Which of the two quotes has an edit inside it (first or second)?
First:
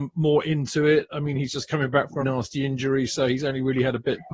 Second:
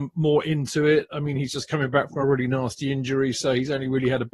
first